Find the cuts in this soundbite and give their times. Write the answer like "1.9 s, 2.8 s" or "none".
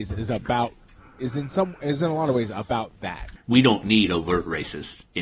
3.4 s